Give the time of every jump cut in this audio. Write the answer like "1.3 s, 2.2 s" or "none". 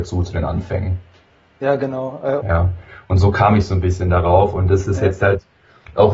2.4 s